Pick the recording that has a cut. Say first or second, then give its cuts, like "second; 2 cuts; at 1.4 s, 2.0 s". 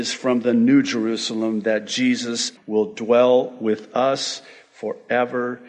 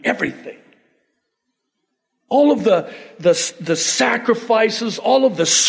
first; 1 cut; at 2.6 s